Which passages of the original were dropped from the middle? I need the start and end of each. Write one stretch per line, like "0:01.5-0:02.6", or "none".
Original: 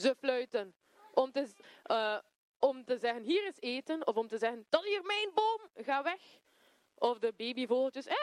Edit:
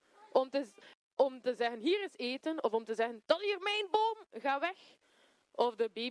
0:01.8-0:02.4